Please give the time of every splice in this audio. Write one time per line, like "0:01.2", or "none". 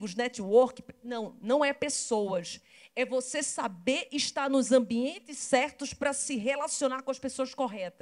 none